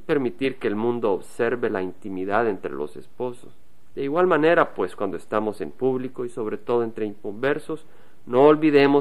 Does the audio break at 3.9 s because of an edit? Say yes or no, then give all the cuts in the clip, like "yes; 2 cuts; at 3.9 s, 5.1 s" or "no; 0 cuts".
yes; 1 cut; at 3.9 s